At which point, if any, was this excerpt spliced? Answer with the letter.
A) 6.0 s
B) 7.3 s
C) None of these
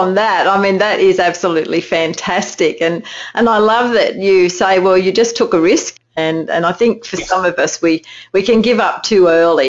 A